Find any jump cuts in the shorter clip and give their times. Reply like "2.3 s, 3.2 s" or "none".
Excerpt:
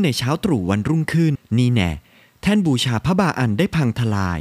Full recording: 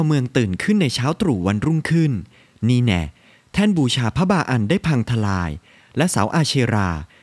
1.3 s